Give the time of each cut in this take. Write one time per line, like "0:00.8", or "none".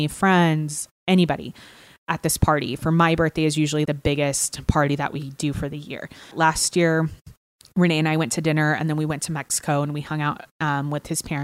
0:03.9
0:06.3

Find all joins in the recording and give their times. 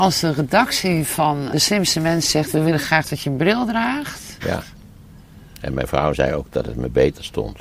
0:01.5
0:04.4

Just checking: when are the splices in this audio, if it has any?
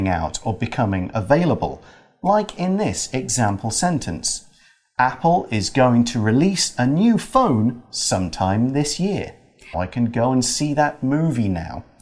0:09.7

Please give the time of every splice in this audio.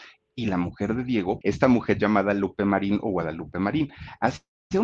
0:01.4

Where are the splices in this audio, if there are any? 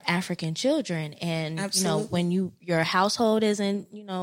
none

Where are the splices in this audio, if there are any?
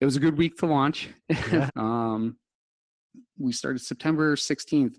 0:01.7

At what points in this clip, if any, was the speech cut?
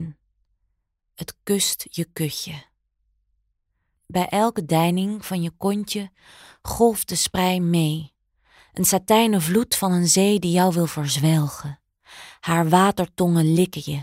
none

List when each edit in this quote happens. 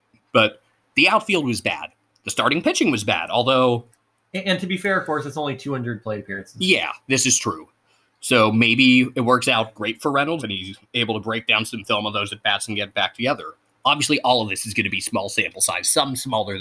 0:10.4

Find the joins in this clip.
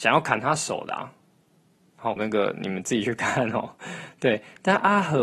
0:02.2

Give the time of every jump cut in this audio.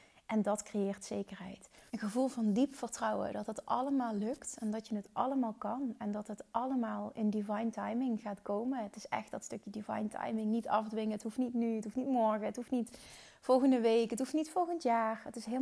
0:01.9

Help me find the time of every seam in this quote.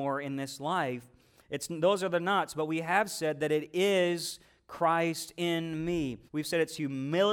0:01.4
0:06.3

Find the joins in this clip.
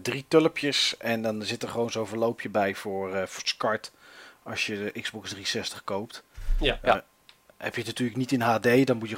none

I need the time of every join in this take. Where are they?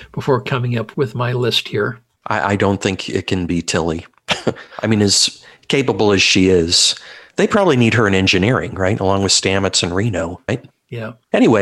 0:10.5

